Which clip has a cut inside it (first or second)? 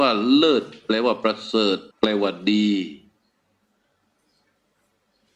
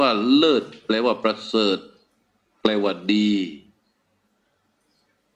first